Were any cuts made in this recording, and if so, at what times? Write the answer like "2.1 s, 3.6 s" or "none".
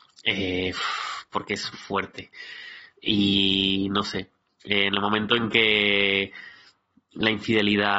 1.7 s, 3.0 s